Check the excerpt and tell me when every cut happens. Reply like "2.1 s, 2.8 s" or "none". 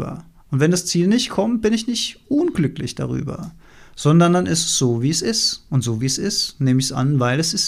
none